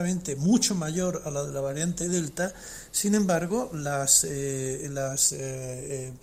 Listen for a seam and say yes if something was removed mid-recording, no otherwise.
no